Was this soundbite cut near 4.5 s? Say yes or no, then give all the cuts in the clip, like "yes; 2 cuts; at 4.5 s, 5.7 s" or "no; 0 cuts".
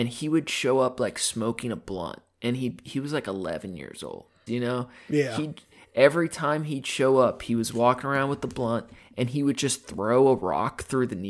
yes; 1 cut; at 4.5 s